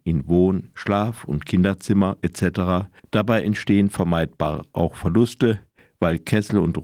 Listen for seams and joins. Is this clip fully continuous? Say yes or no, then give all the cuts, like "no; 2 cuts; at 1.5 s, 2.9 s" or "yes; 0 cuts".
no; 1 cut; at 3.0 s